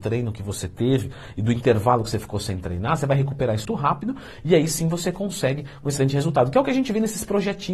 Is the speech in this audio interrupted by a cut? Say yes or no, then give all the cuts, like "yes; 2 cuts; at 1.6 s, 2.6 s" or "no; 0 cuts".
yes; 1 cut; at 3.7 s